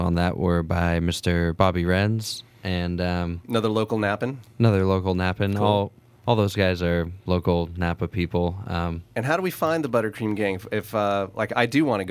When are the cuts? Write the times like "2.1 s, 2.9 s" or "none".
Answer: none